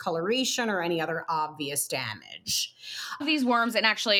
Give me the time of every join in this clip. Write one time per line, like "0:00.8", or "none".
0:03.2

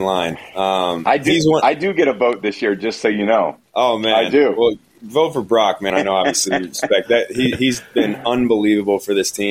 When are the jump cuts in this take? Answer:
0:03.6
0:05.9

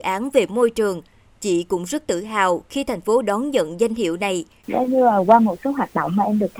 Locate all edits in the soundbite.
0:04.6

